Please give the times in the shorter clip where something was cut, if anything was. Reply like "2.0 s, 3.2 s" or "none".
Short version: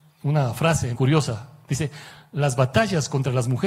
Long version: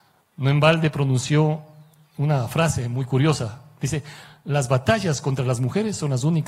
0.9 s

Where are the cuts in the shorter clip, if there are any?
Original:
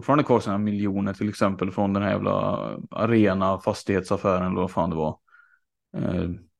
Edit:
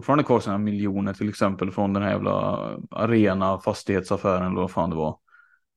none

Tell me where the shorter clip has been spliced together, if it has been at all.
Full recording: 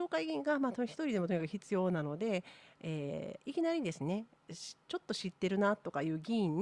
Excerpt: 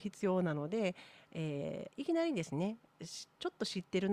none

